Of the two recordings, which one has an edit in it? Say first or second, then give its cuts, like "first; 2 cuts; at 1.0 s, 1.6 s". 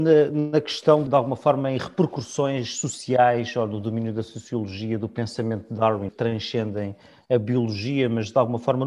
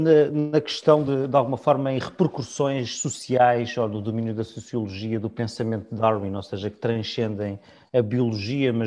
first; 2 cuts; at 1.1 s, 6.1 s